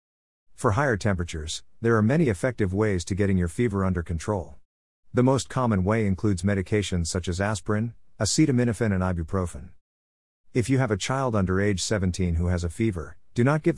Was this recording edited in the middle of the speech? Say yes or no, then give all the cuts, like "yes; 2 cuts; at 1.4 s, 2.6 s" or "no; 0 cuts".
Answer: no; 0 cuts